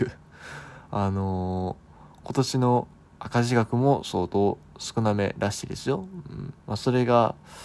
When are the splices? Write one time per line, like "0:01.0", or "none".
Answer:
0:06.6